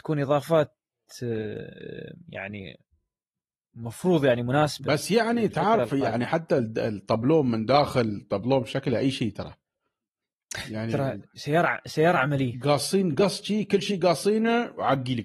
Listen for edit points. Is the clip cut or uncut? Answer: uncut